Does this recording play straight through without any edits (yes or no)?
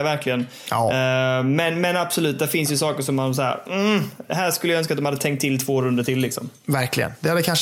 yes